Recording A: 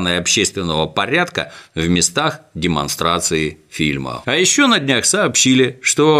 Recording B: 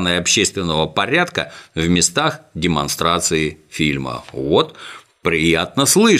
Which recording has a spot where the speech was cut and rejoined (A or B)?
A